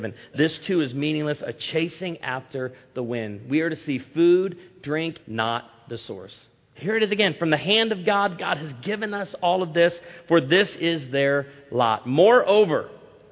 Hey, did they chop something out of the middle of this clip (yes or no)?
yes